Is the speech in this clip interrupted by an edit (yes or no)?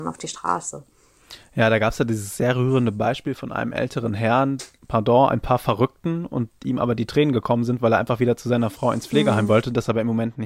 yes